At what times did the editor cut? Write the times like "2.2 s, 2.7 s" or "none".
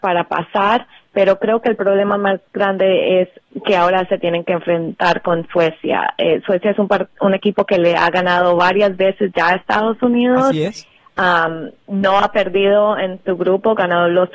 none